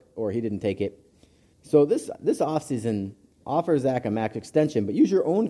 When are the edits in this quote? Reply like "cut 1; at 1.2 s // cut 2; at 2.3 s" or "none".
cut 1; at 1.5 s // cut 2; at 3.4 s